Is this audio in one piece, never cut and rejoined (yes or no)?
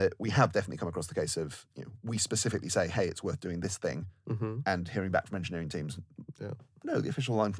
yes